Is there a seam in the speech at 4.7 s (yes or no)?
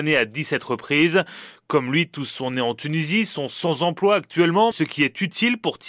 yes